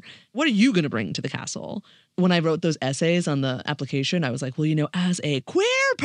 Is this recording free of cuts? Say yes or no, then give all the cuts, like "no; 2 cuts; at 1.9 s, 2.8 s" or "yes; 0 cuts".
yes; 0 cuts